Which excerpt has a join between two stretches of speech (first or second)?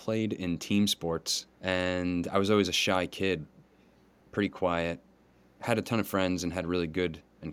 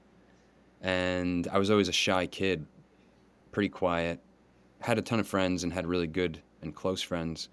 first